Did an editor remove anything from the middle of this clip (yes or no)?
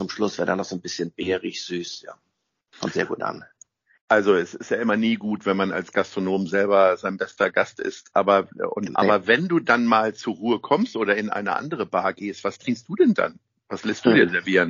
yes